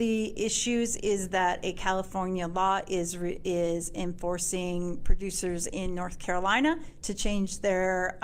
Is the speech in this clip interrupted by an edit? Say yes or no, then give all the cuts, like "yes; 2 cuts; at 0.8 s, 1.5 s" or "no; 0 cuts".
no; 0 cuts